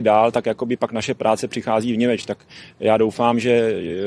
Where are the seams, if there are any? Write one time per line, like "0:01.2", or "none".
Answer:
none